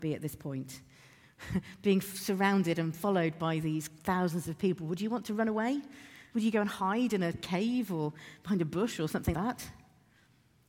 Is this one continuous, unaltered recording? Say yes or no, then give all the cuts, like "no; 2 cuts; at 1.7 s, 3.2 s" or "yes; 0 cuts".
no; 2 cuts; at 6.3 s, 9.3 s